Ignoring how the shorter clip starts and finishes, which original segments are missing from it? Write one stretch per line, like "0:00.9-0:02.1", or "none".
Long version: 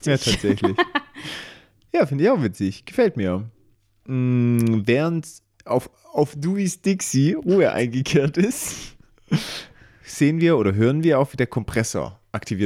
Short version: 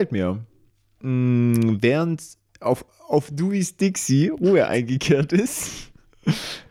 none